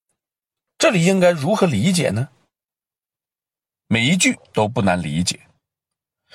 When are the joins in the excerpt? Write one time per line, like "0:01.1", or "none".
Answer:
0:03.7